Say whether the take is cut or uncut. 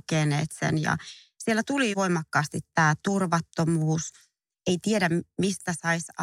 cut